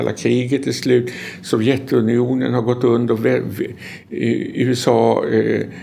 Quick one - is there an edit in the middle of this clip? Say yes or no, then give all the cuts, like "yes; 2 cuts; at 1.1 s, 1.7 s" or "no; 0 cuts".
no; 0 cuts